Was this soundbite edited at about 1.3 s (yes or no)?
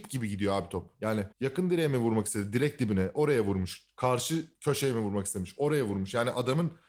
yes